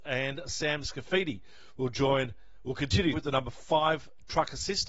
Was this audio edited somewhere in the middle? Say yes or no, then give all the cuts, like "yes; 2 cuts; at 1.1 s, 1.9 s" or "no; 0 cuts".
yes; 1 cut; at 3.1 s